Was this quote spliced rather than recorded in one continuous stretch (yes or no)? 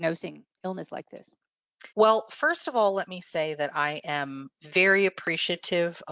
yes